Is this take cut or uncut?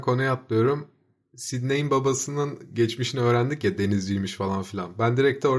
uncut